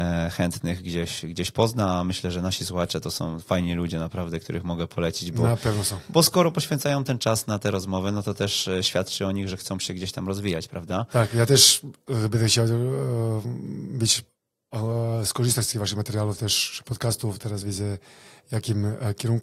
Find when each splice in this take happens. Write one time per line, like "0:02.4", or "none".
0:17.6